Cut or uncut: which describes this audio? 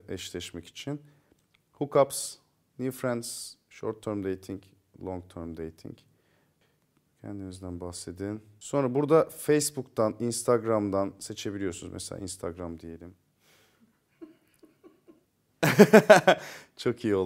uncut